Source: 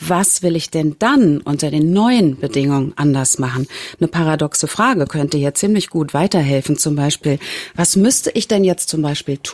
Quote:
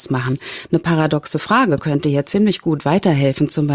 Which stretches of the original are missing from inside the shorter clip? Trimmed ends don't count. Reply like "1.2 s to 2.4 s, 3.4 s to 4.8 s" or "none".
none